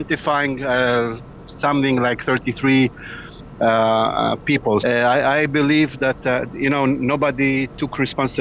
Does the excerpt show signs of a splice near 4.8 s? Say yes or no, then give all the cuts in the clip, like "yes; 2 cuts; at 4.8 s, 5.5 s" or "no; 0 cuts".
yes; 1 cut; at 4.8 s